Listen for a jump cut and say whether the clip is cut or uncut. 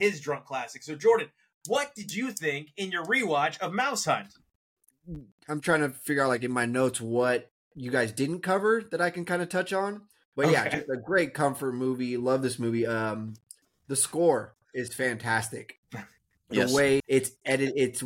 cut